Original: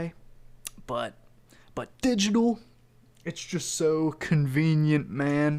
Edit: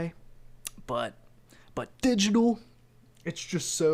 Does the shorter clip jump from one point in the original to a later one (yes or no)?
no